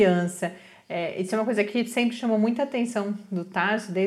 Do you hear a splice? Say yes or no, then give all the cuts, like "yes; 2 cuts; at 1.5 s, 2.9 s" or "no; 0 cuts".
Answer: no; 0 cuts